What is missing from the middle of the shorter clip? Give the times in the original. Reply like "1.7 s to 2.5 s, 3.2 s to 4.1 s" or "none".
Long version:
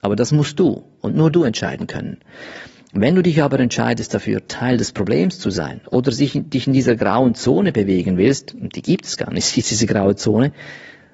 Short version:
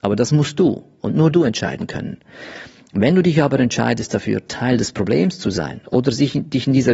none